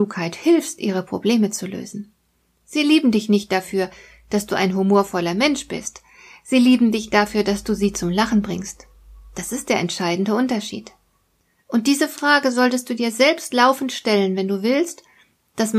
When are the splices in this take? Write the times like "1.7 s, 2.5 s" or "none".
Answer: none

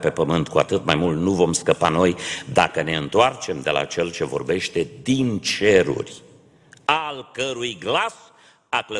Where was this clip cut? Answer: none

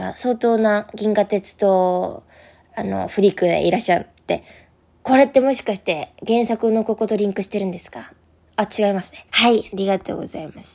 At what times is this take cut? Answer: 9.3 s

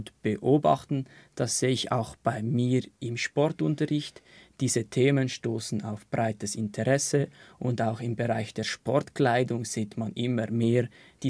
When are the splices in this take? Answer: none

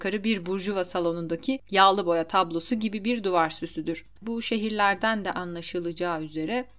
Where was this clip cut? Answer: 4.2 s

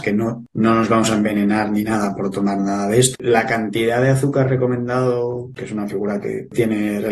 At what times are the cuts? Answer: 3.1 s, 5.6 s

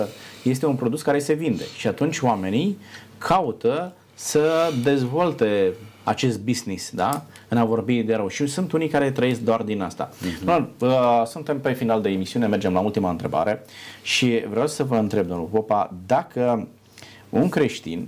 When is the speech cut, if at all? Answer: 6.0 s

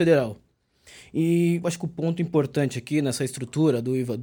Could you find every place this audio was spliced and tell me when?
1.6 s

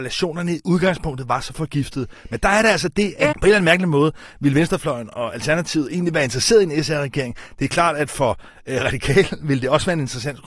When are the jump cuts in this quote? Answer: 3.3 s

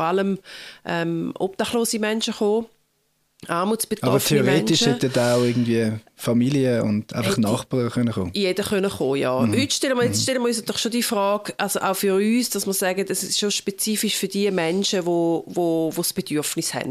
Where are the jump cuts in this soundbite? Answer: none

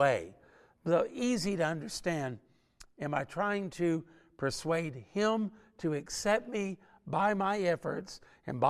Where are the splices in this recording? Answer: none

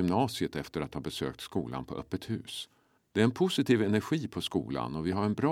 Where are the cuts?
3.0 s

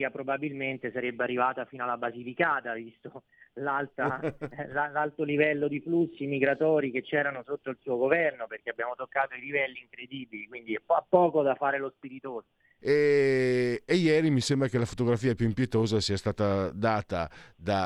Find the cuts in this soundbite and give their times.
12.8 s

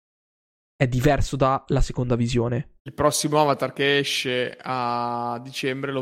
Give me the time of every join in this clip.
2.8 s

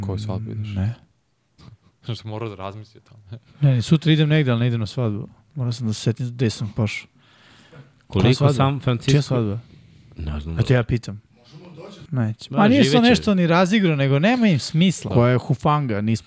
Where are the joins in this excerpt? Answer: 12.1 s, 15.1 s

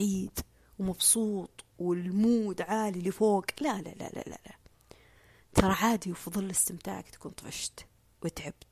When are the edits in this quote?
1.7 s

